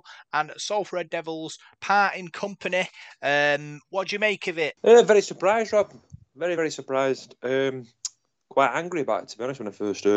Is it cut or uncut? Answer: uncut